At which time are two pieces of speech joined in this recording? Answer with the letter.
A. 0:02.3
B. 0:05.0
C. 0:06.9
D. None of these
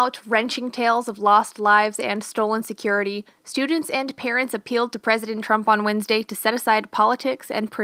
D